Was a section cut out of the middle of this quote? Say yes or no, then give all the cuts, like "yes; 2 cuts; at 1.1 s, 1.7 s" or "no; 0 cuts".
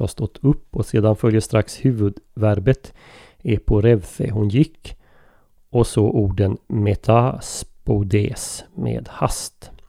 no; 0 cuts